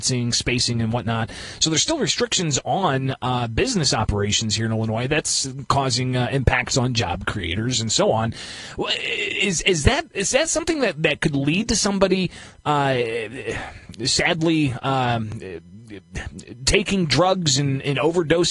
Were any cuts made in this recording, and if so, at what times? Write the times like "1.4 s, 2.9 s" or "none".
none